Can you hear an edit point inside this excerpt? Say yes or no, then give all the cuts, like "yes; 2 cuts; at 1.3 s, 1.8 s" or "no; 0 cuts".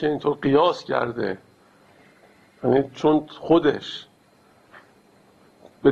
no; 0 cuts